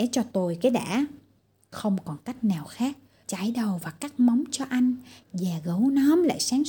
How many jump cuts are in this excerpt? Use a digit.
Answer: 1